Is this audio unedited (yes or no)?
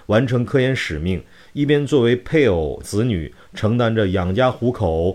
no